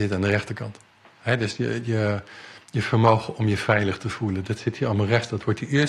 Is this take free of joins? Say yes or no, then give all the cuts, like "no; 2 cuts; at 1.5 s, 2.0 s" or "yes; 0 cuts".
yes; 0 cuts